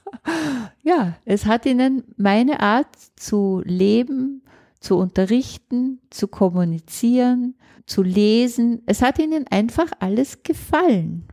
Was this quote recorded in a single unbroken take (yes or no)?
no